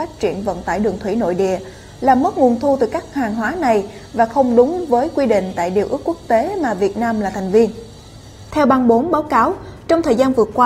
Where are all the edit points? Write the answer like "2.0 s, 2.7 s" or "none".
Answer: 8.5 s